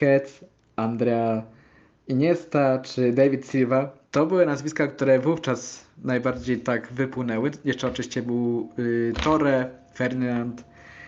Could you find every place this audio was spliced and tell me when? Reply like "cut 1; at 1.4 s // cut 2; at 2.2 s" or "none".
cut 1; at 4.1 s